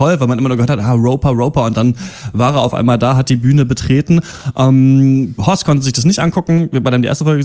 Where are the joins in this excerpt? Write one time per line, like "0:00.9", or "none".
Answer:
0:05.4